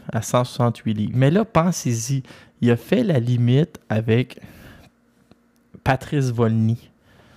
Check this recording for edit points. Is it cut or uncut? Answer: cut